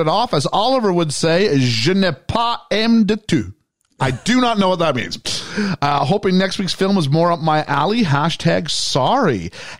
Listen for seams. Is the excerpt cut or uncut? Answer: uncut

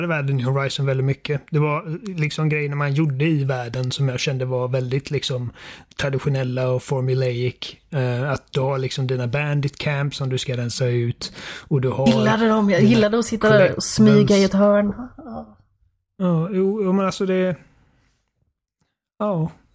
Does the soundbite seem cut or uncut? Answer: uncut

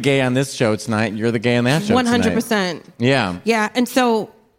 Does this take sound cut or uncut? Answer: uncut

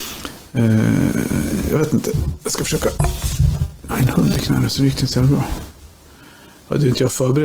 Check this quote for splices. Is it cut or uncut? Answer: uncut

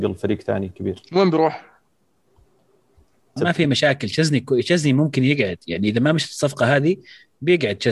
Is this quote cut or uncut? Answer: cut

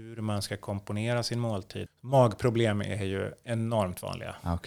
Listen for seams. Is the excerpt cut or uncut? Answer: cut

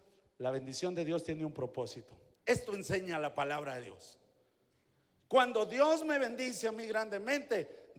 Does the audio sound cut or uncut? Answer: cut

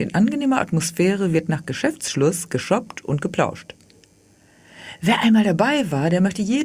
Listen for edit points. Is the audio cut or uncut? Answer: uncut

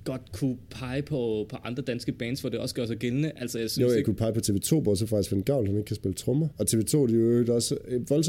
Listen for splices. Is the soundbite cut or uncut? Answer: uncut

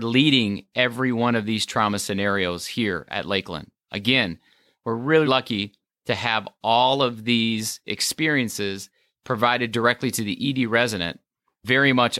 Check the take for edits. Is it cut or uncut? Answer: cut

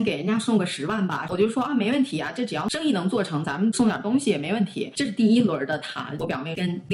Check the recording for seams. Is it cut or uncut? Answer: uncut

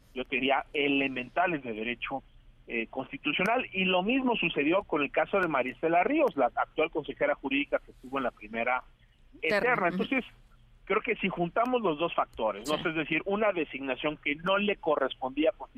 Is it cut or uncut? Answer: cut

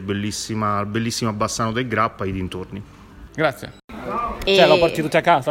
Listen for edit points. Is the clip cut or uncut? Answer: cut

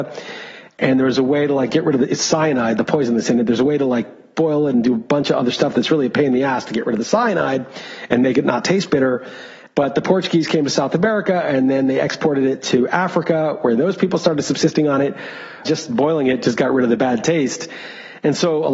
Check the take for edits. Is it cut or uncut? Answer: cut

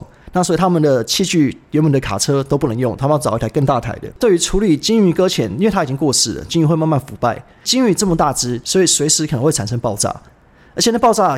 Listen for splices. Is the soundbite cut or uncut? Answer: cut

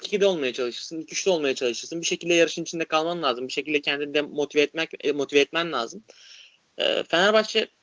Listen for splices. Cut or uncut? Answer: uncut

